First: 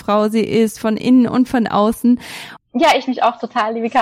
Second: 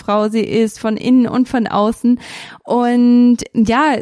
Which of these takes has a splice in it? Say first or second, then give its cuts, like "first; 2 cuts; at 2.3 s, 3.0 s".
first; 1 cut; at 2.6 s